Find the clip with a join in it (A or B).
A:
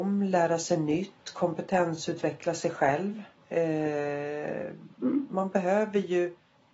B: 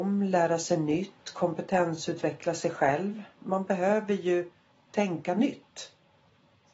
B